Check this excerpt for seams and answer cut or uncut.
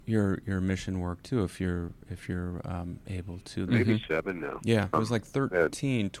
cut